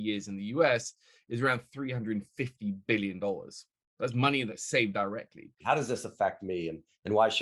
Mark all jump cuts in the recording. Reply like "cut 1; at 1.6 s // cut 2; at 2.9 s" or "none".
cut 1; at 5.6 s